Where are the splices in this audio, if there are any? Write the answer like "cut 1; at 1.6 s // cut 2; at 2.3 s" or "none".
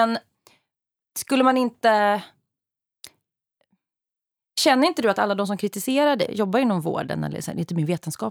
cut 1; at 6.3 s